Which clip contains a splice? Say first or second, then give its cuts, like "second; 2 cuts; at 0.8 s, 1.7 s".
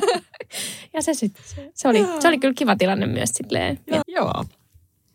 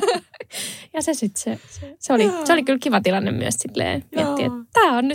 first; 2 cuts; at 1.4 s, 4.0 s